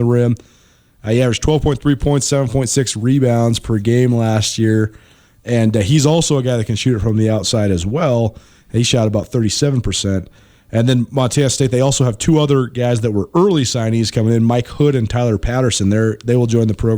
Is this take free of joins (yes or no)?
yes